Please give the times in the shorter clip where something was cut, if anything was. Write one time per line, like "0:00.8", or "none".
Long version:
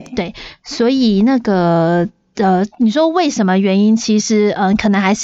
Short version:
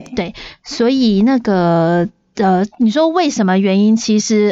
none